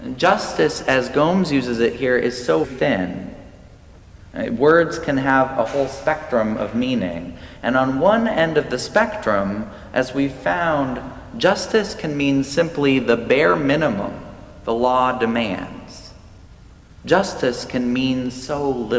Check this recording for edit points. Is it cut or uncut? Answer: cut